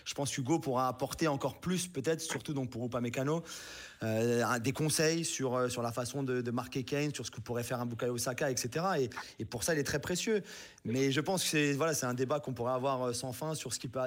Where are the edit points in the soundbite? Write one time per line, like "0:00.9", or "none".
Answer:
none